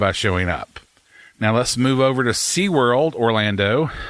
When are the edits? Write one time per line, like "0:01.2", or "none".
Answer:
none